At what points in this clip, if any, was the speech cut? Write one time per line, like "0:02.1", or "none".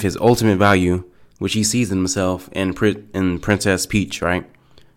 none